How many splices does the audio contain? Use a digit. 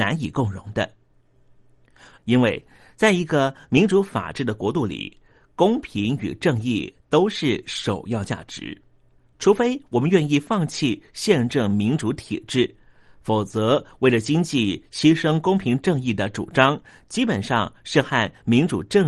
1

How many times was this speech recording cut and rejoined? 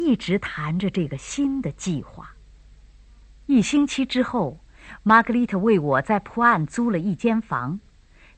0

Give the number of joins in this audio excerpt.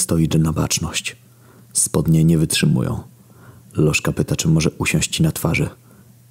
0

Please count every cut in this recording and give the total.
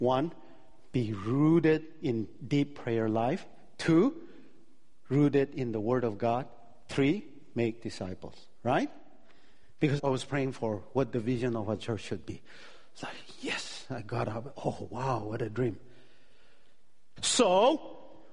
2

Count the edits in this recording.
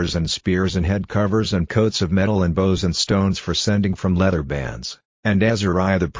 1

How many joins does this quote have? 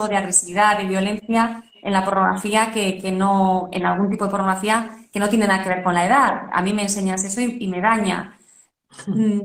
0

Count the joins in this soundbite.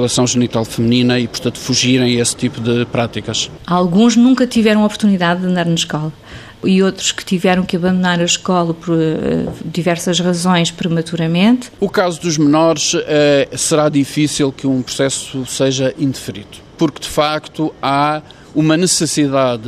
0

